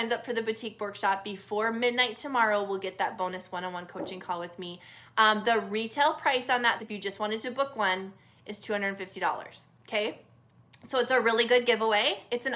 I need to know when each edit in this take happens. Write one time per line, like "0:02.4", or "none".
0:06.8